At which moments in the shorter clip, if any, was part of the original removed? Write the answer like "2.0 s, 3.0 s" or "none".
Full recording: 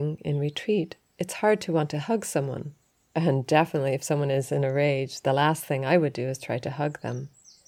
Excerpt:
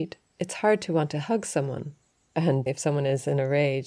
2.7 s